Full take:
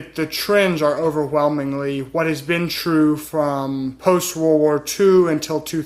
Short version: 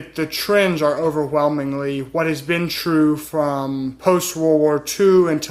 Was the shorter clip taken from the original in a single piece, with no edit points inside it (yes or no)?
yes